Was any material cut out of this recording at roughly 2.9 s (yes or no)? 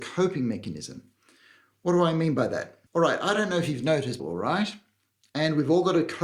yes